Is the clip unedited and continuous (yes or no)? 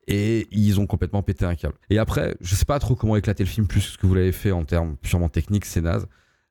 no